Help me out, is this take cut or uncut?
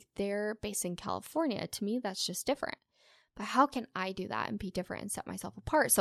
uncut